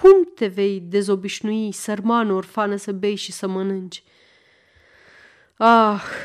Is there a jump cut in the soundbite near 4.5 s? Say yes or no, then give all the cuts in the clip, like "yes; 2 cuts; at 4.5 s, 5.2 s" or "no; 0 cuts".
no; 0 cuts